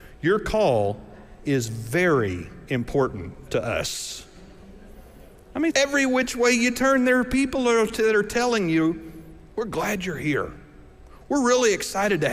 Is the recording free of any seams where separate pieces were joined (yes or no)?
no